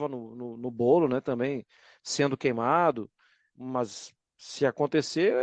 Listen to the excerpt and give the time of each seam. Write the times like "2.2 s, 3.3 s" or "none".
3.5 s